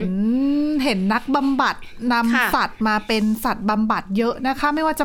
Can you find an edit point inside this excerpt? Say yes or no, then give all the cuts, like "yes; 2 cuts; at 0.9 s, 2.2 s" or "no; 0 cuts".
no; 0 cuts